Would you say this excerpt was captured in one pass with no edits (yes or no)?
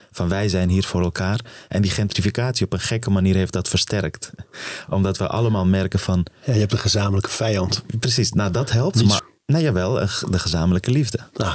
no